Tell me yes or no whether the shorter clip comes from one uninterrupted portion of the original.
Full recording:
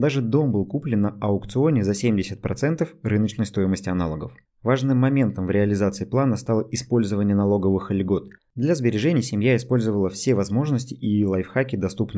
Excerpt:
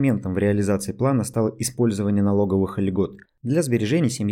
yes